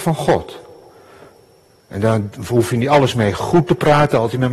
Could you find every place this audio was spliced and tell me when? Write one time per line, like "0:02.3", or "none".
none